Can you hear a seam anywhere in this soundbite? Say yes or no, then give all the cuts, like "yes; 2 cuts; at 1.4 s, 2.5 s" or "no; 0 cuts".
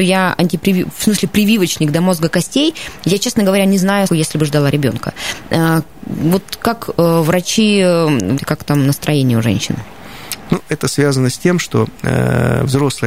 yes; 3 cuts; at 4.1 s, 8.4 s, 10.5 s